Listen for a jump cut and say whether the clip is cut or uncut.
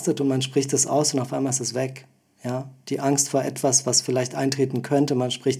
uncut